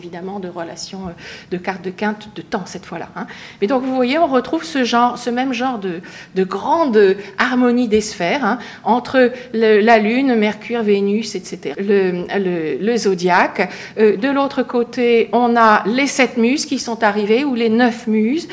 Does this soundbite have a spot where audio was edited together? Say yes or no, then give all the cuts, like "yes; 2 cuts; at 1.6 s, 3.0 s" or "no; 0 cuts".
yes; 1 cut; at 11.7 s